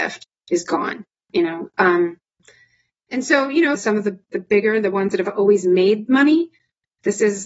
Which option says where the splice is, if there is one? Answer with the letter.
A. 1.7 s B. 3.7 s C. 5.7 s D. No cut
B